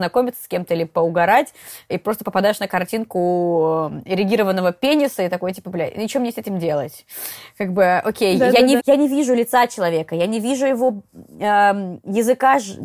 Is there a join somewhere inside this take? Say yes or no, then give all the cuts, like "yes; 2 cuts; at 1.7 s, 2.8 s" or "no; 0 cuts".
yes; 1 cut; at 8.8 s